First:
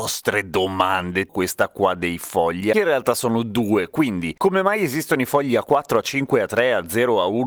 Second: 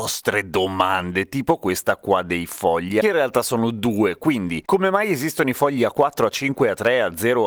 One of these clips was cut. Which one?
first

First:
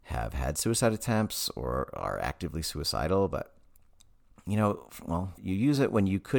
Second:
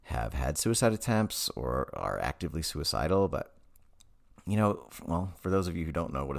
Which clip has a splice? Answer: first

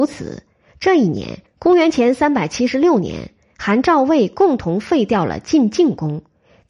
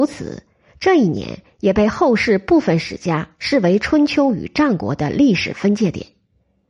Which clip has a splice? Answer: first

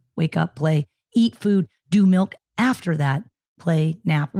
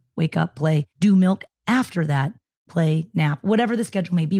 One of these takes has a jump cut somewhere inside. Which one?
second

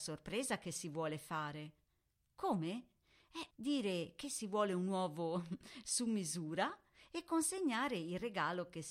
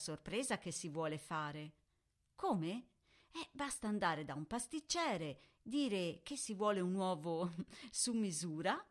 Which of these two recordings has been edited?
first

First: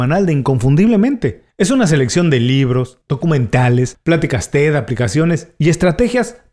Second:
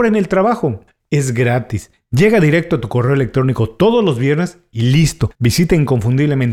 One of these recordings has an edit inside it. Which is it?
second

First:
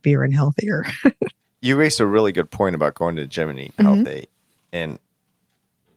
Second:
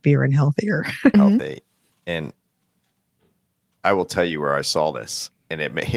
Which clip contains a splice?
second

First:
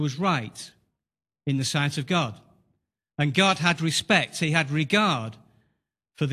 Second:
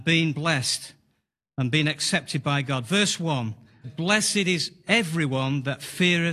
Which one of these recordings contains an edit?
second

